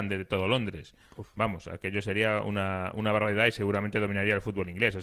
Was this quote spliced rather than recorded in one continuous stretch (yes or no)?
no